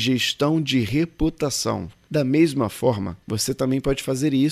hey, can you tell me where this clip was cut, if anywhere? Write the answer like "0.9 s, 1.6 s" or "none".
2.1 s, 3.2 s